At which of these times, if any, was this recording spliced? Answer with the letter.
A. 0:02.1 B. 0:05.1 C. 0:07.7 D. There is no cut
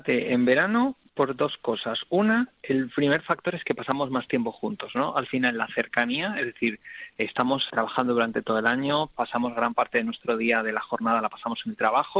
C